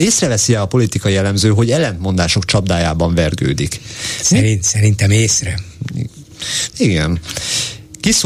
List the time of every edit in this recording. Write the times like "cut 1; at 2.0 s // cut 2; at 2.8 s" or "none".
none